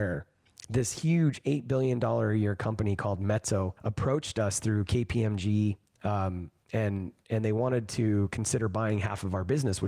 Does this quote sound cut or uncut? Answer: cut